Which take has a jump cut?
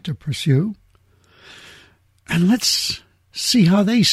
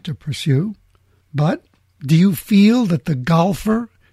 second; 1 cut; at 1.2 s

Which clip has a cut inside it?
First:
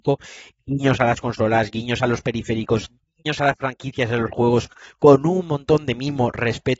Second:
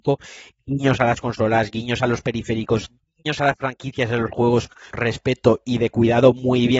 second; 1 cut; at 4.9 s

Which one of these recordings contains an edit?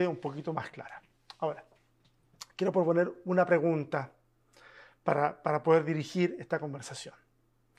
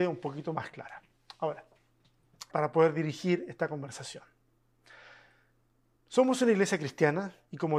second; 1 cut; at 2.5 s

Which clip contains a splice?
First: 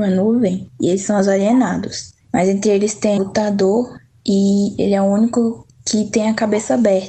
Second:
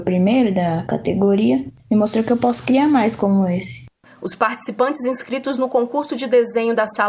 first; 1 cut; at 3.2 s

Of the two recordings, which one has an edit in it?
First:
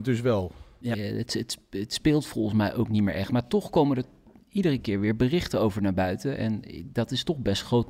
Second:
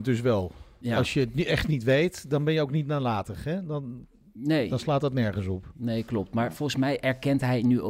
first; 1 cut; at 0.9 s

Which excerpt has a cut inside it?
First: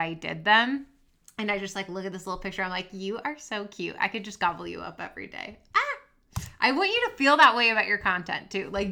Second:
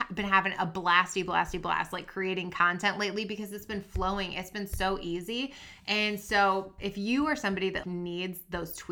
second; 2 cuts; at 6.8 s, 7.8 s

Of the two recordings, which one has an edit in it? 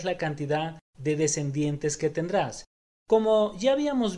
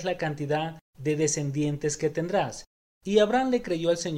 first; 1 cut; at 2.9 s

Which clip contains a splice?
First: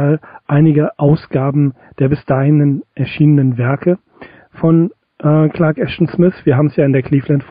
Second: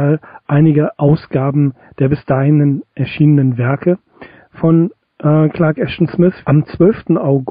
second; 1 cut; at 6.4 s

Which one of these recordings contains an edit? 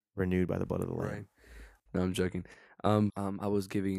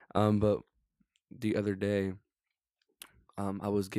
first; 2 cuts; at 1.9 s, 3.1 s

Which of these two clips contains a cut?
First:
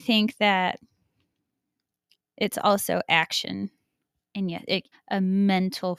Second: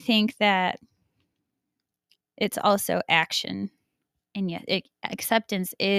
first; 1 cut; at 4.9 s

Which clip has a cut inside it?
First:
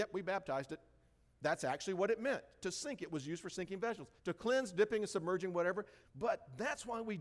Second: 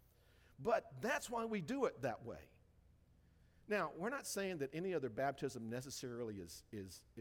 first; 2 cuts; at 4.2 s, 6.0 s

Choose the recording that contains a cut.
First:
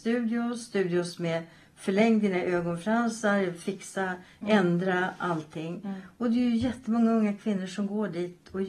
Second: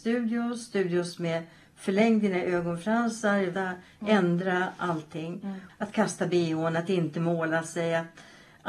second; 2 cuts; at 3.5 s, 5.7 s

